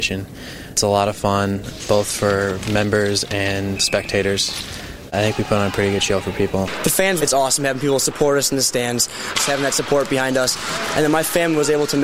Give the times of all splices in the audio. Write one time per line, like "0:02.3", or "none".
0:07.2
0:09.3